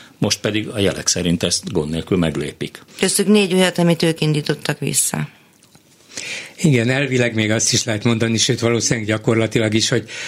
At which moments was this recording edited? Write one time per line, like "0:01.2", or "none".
0:02.9